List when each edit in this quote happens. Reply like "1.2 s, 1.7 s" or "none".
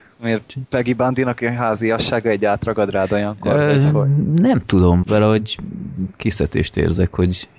5.0 s